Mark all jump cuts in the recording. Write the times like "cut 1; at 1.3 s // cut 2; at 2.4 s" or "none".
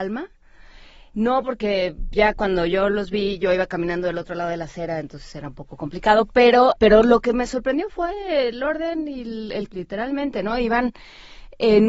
cut 1; at 6.8 s // cut 2; at 9.7 s